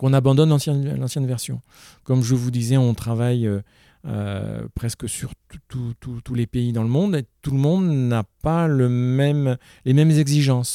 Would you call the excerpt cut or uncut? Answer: uncut